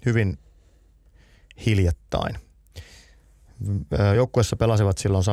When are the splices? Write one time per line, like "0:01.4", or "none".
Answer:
none